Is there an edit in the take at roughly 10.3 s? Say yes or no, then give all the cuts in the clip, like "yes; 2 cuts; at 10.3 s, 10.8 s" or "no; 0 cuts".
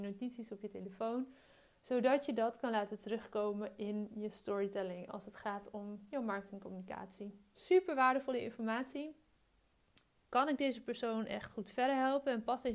yes; 1 cut; at 10.3 s